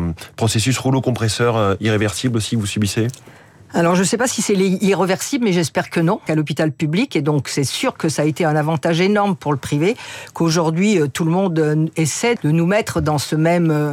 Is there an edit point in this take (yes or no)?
yes